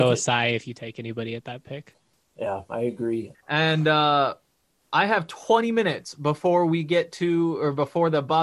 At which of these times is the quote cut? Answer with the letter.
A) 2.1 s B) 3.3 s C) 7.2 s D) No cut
B